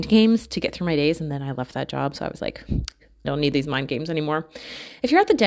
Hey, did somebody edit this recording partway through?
yes; 1 cut; at 3.2 s

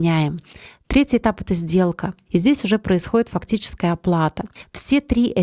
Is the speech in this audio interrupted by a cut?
yes; 1 cut; at 2.3 s

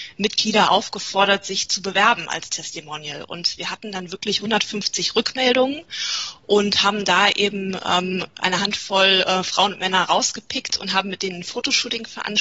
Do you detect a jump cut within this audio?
no; 0 cuts

